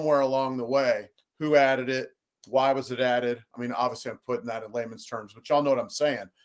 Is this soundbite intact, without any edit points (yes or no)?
no